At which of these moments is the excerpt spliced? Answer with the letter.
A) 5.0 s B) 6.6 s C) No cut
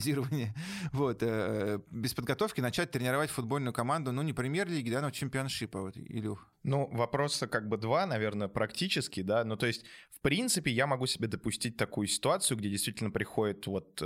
C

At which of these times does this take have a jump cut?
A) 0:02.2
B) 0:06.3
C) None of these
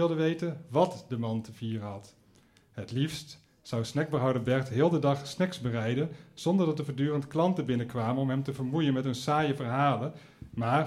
C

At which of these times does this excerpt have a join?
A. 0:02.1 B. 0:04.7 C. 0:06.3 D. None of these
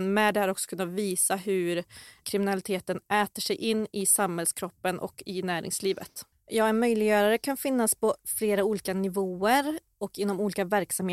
C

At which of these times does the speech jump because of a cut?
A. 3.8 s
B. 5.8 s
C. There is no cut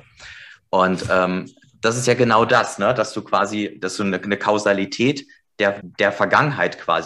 B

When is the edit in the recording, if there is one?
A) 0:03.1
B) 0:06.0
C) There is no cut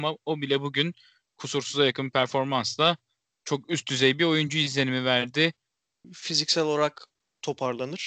B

